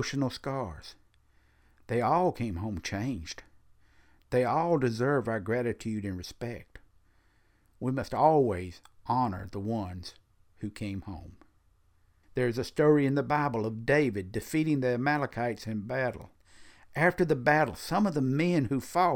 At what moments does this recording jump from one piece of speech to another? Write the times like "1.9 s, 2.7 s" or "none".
none